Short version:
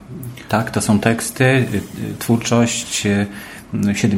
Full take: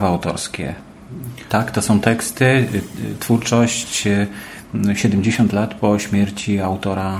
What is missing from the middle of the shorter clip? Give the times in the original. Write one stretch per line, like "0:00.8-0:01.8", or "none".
none